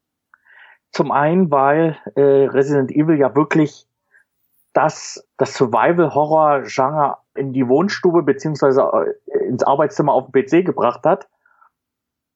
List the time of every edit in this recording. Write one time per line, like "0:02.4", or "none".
0:05.2
0:07.4